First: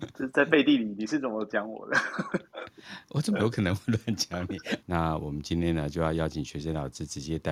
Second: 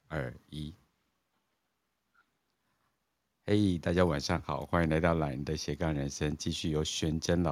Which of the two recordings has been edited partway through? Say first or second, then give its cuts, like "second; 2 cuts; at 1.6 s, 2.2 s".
first; 1 cut; at 4.8 s